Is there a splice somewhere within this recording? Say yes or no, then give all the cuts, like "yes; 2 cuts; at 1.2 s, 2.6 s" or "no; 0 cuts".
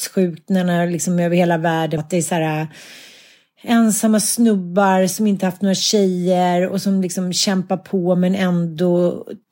yes; 1 cut; at 2.0 s